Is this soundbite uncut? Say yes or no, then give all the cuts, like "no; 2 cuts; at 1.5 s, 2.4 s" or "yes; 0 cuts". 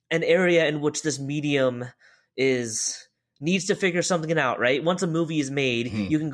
yes; 0 cuts